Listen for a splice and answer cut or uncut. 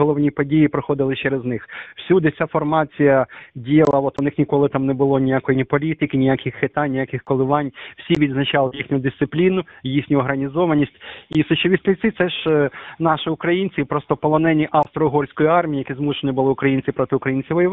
uncut